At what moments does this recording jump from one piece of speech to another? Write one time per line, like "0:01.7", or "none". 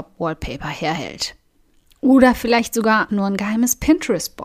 0:03.1